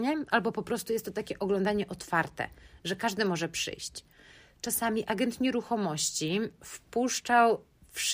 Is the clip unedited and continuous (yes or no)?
yes